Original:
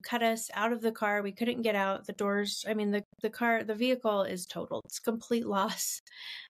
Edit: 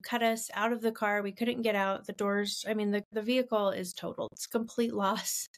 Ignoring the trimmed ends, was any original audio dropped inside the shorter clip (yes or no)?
yes